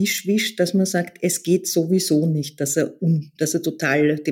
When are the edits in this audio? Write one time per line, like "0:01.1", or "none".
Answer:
none